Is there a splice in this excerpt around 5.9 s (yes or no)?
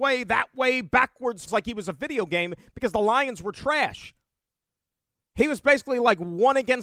no